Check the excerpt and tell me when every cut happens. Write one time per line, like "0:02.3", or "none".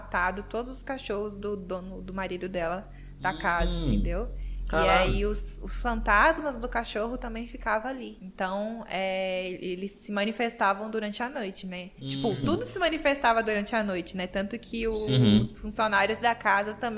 none